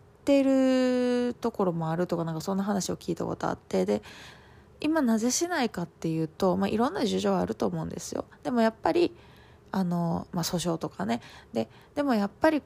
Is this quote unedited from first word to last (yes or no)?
yes